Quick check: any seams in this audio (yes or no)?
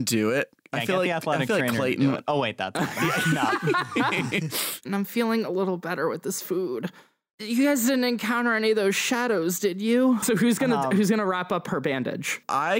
yes